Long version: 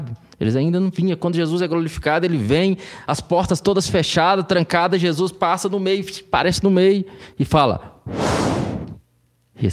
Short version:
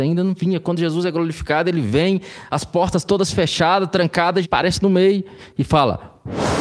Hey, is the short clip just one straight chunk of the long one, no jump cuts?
no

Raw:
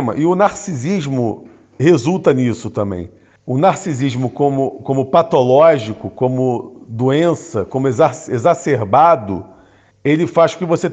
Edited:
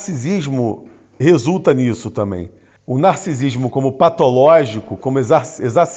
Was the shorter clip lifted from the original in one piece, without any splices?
no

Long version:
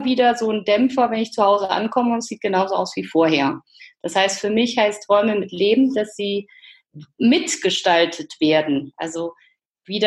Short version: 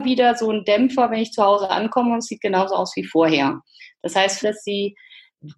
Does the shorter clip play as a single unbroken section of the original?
no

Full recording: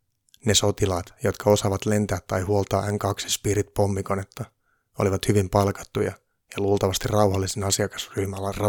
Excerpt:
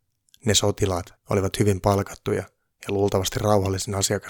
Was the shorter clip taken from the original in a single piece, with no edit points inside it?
no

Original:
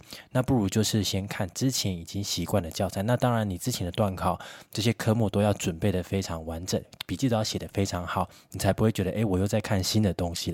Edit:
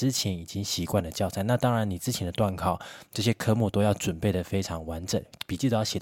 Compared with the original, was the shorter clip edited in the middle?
no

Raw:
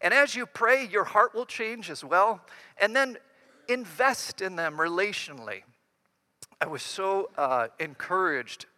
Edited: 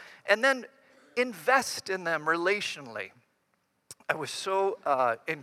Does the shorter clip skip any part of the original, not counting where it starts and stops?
no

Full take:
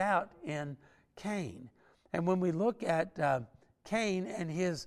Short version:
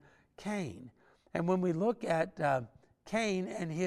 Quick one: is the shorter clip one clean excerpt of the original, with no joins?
yes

